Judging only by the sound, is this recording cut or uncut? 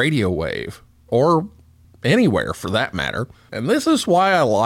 cut